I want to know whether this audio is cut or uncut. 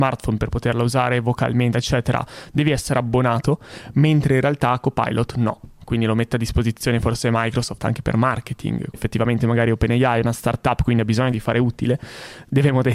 cut